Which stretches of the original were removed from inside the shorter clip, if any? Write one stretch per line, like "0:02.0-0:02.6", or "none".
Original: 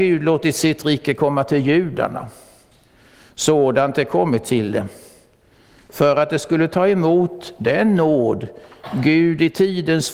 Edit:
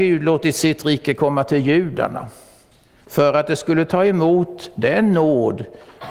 0:03.0-0:05.8

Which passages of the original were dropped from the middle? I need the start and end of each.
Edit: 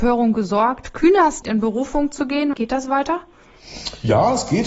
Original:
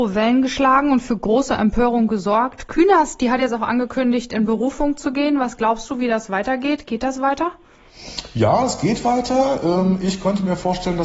0:03.2-0:04.3
0:05.4-0:06.8

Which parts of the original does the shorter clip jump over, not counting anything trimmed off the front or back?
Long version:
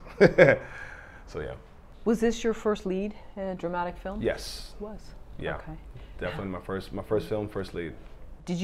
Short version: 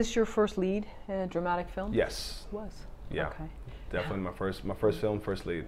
none

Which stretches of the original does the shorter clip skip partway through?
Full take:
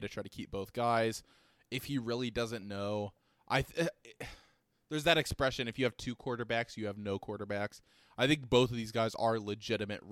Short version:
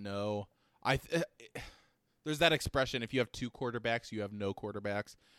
none

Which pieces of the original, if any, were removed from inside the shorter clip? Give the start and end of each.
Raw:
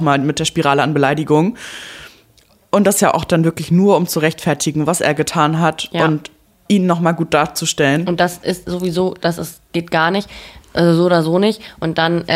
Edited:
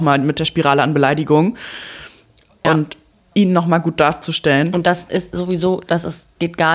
0:02.6-0:06.0

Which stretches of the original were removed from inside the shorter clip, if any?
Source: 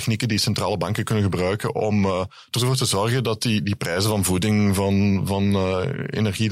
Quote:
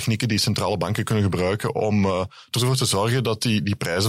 none

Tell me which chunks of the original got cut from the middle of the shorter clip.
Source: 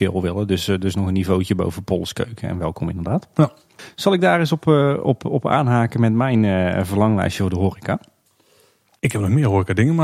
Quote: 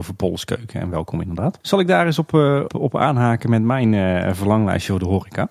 0:03.3-0:03.9
0:05.0-0:05.2

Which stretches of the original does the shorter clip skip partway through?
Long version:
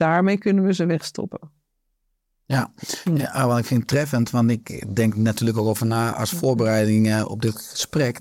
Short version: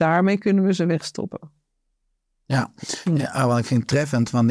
none

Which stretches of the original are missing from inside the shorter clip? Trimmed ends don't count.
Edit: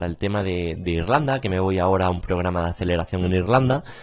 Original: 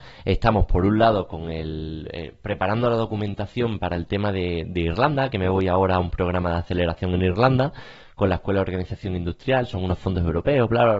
none

